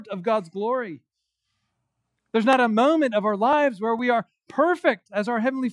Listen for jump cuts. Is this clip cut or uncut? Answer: uncut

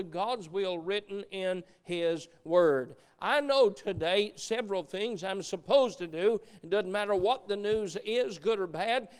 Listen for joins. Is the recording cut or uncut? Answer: uncut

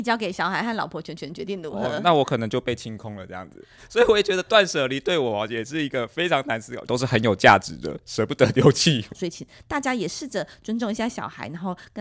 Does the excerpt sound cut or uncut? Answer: cut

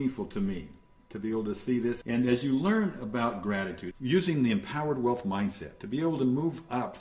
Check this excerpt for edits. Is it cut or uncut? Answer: cut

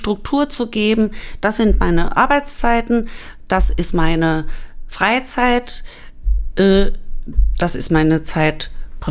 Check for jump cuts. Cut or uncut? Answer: uncut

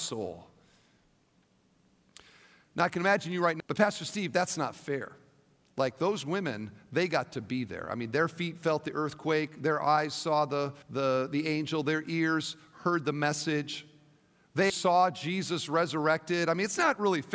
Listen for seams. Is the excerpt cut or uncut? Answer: cut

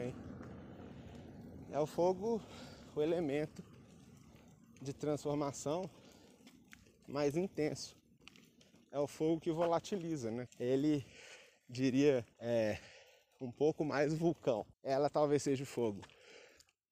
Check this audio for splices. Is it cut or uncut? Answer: cut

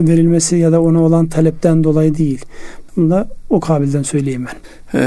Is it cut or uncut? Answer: cut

